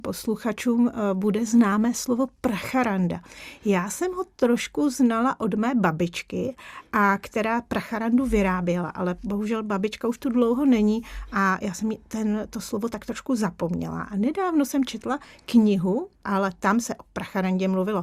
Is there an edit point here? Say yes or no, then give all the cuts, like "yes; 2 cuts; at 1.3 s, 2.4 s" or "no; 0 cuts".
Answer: yes; 1 cut; at 16.2 s